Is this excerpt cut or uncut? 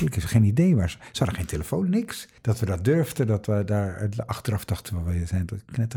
cut